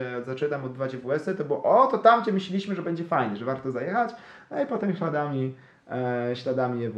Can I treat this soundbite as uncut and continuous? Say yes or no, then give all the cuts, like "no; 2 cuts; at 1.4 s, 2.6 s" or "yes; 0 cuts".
yes; 0 cuts